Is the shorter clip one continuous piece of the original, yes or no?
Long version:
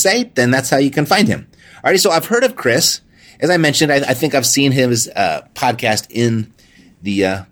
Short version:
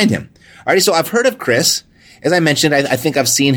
yes